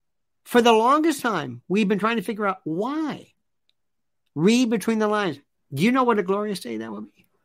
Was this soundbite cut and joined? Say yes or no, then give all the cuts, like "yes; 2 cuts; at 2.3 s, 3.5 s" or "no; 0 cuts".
yes; 2 cuts; at 4.3 s, 5.5 s